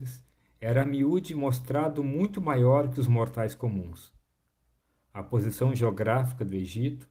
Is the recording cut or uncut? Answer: uncut